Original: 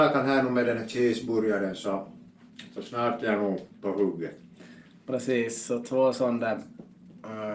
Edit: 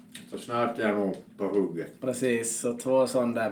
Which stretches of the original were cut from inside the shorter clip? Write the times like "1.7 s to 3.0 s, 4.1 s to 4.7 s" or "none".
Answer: 4.4 s to 5.0 s

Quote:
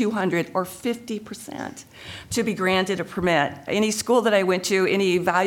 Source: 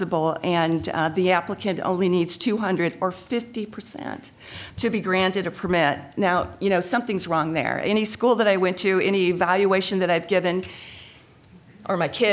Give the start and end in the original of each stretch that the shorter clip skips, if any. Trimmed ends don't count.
6.1 s to 7.8 s

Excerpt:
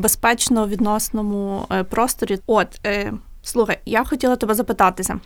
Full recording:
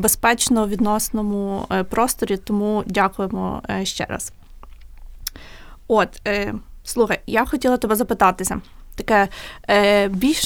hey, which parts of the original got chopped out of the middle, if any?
2.4 s to 5.8 s

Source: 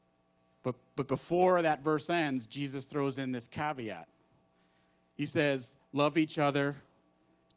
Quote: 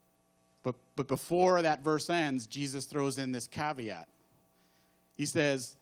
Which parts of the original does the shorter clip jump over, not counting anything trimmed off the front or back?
none

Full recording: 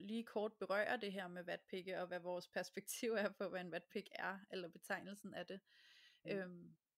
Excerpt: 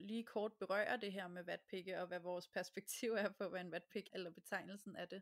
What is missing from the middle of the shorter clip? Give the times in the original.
4.1 s to 4.5 s

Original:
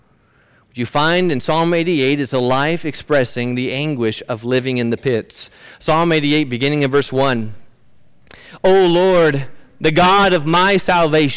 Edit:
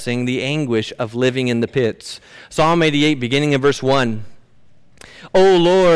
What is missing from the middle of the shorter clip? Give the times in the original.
none

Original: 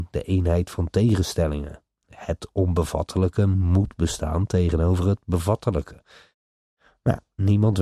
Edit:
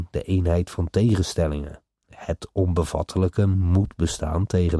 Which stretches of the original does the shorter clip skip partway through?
none

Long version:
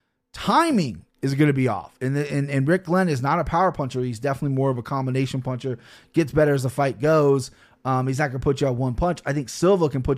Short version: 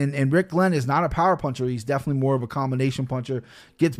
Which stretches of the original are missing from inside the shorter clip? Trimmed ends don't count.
none

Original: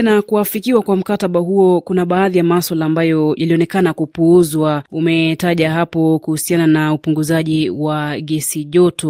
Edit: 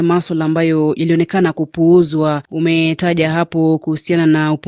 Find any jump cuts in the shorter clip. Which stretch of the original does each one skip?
none

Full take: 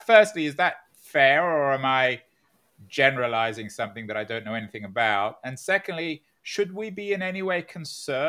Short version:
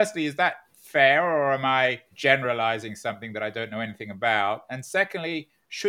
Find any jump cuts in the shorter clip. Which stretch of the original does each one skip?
2.3 s to 2.8 s

